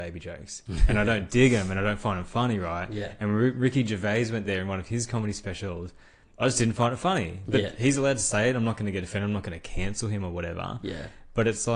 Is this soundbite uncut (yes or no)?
yes